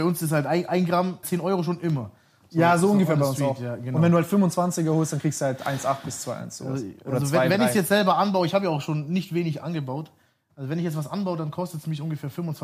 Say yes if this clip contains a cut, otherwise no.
yes